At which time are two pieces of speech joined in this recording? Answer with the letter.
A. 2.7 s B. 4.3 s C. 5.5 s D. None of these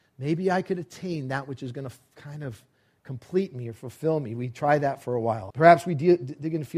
C